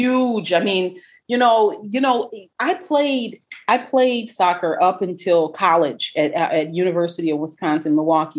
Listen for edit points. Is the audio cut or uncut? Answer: uncut